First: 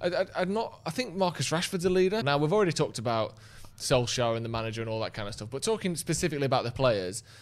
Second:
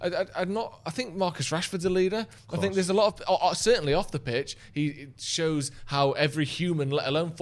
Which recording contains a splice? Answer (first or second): first